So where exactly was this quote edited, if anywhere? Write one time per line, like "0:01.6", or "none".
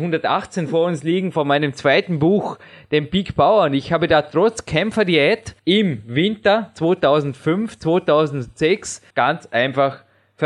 0:05.6
0:09.1